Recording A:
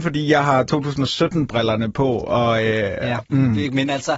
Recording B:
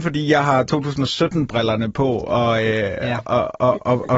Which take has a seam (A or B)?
A